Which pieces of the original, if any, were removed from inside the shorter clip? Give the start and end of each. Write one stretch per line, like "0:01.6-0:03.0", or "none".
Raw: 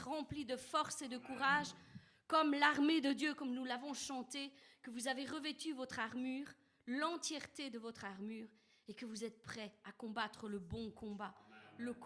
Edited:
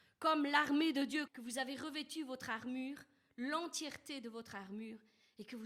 0:03.4-0:04.8